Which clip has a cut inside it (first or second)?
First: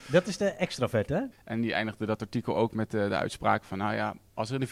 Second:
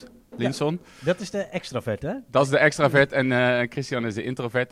first